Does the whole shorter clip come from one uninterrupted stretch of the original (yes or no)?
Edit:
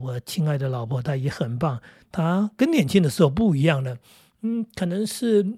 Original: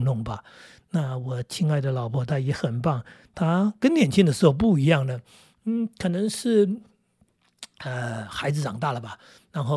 yes